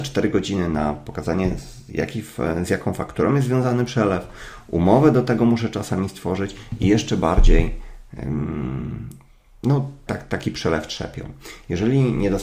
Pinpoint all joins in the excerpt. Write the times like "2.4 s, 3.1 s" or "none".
10.1 s